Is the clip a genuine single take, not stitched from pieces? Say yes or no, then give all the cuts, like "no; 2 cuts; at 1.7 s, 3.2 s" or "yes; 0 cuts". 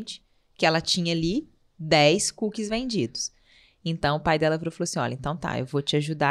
yes; 0 cuts